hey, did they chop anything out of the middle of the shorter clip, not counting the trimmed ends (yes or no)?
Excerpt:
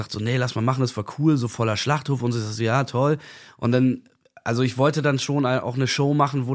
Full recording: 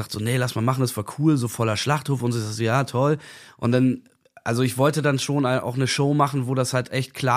no